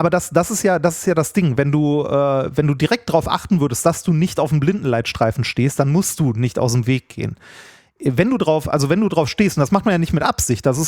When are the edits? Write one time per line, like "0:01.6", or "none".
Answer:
none